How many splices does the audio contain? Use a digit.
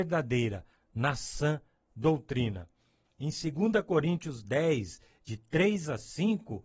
1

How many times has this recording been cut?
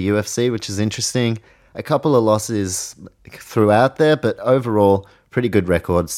1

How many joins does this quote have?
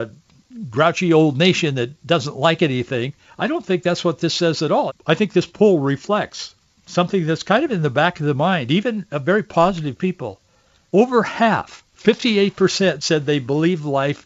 2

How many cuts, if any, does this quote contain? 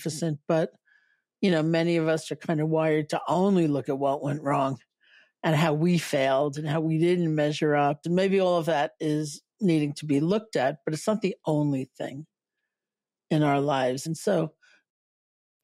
2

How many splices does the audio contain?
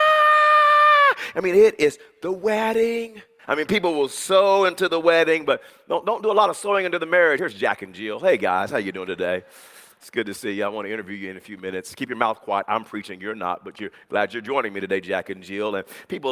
2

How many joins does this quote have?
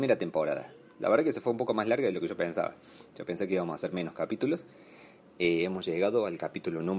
0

